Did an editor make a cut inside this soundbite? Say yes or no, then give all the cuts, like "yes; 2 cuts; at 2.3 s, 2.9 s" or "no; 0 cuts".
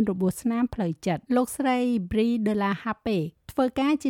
yes; 1 cut; at 1.3 s